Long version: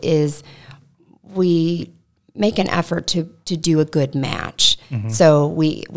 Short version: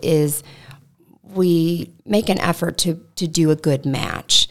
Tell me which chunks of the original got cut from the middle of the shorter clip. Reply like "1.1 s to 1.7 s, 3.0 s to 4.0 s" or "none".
2.0 s to 2.3 s